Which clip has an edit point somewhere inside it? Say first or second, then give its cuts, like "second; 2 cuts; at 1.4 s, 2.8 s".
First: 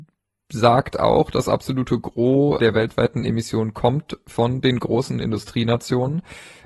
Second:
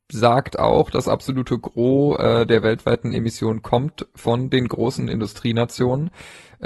first; 1 cut; at 2.6 s